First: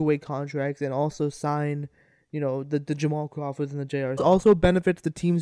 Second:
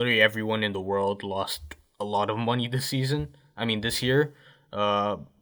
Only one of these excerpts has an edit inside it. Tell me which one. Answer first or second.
first